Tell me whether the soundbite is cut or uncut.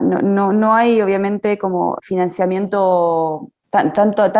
cut